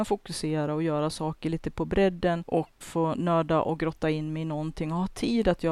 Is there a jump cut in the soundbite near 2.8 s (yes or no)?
yes